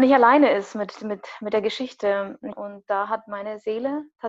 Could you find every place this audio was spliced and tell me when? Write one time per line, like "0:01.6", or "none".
0:02.5